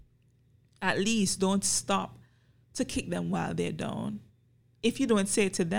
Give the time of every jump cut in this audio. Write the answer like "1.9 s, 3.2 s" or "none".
none